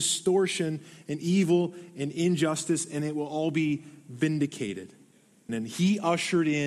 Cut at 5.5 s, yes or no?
yes